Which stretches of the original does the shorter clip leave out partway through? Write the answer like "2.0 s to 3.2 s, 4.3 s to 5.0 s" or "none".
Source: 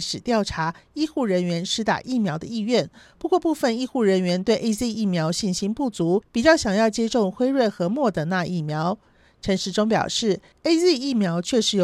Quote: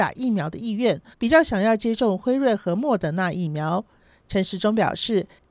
3.0 s to 6.3 s